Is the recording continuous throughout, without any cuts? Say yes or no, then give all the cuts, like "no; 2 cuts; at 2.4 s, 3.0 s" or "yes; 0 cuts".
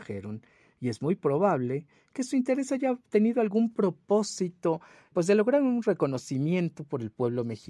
no; 1 cut; at 5.1 s